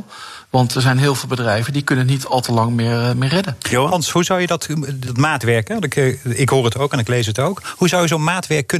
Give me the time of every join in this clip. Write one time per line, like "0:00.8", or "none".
none

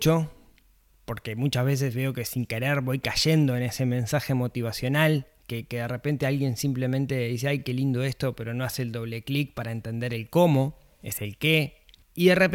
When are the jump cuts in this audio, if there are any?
none

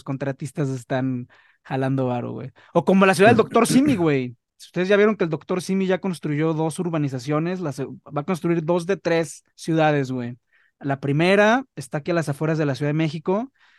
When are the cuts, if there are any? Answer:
0:09.5

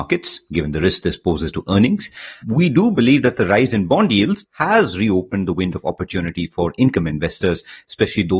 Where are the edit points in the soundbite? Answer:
0:02.4
0:04.4

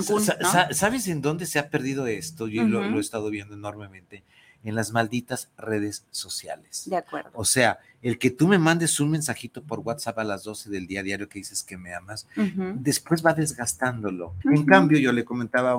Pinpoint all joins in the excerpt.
0:14.4

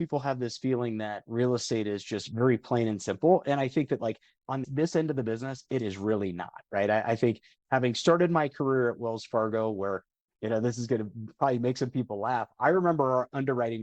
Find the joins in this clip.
0:04.6

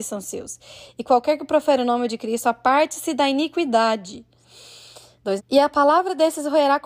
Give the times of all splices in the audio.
0:05.4

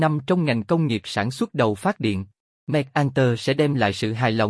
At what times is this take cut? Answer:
0:02.5

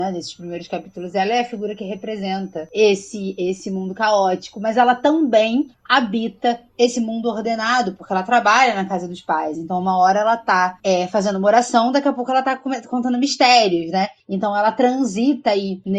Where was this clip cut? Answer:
none

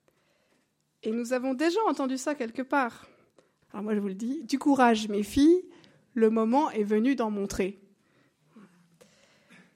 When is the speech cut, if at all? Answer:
0:03.6

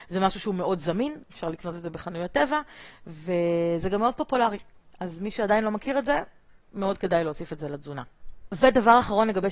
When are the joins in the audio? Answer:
none

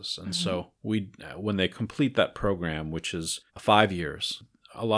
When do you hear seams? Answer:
0:03.5

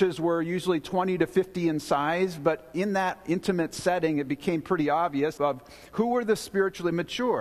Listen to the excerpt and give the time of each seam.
0:05.4

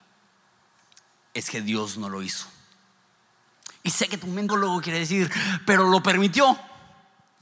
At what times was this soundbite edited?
0:04.5

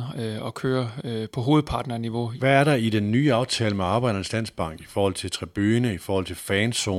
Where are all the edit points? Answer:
0:02.4

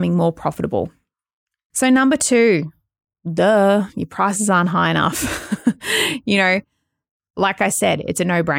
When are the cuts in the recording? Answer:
none

